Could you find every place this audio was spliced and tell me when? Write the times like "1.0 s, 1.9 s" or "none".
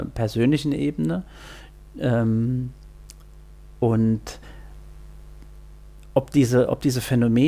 none

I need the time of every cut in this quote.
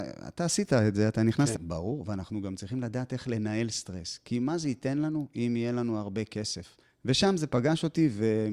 1.5 s, 6.8 s

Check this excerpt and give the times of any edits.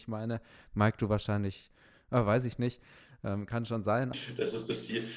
4.1 s

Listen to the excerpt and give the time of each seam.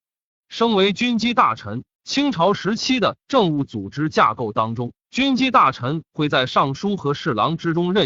2.0 s, 5.0 s

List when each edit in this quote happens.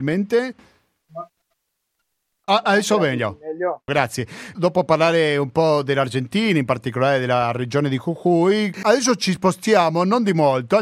2.4 s, 4.5 s, 8.7 s

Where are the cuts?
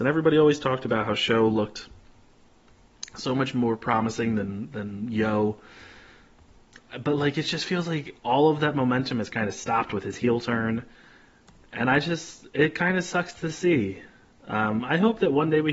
none

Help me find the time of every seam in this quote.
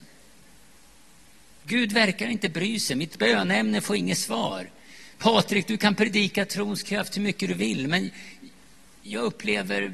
none

